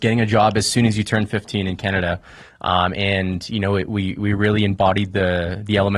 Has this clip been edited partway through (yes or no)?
no